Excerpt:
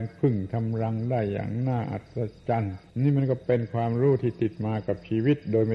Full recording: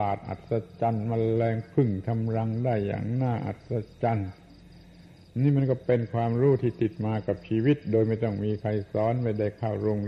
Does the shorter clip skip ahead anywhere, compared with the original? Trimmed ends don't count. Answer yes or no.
yes